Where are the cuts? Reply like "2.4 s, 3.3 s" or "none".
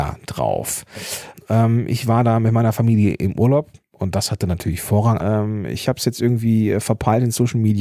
1.3 s, 5.2 s